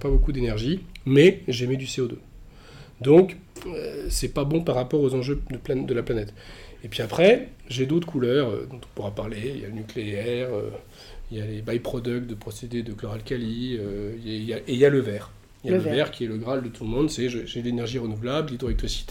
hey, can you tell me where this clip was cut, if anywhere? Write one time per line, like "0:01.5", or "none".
none